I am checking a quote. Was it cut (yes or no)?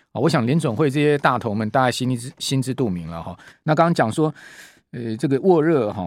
yes